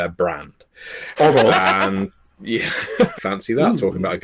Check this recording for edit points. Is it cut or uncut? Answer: cut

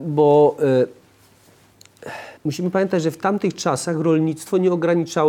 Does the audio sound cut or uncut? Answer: cut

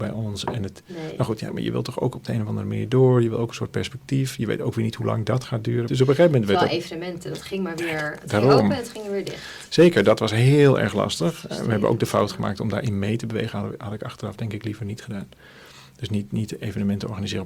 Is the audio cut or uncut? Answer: cut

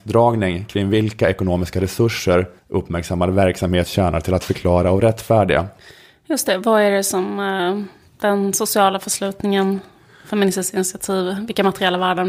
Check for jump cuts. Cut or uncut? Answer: cut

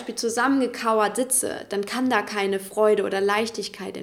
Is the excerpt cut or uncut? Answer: uncut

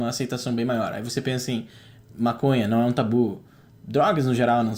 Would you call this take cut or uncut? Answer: uncut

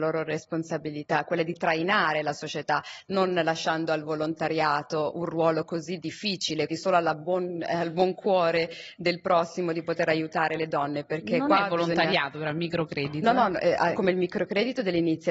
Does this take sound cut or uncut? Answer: cut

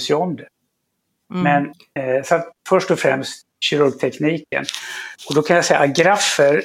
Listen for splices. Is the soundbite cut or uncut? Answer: uncut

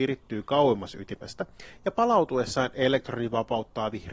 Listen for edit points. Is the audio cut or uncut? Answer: uncut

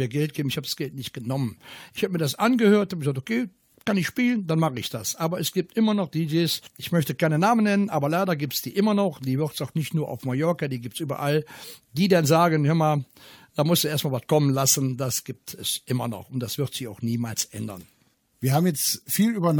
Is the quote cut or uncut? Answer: uncut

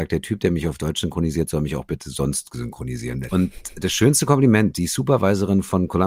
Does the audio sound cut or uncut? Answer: cut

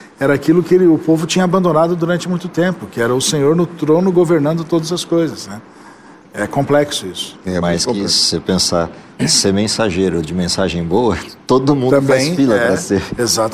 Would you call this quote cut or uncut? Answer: uncut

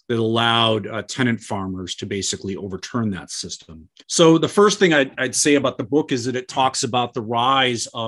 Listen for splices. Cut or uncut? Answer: cut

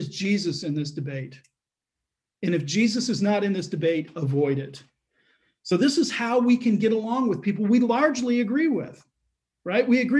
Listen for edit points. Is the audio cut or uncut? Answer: uncut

